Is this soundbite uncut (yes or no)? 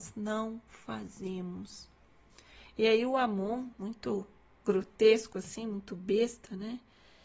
no